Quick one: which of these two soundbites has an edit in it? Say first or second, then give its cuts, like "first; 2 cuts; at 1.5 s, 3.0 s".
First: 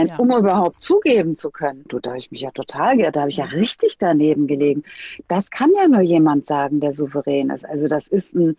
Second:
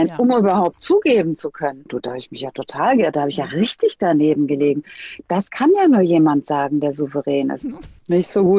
second; 1 cut; at 7.6 s